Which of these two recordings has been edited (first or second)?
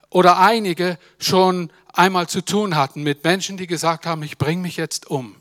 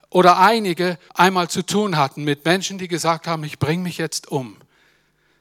second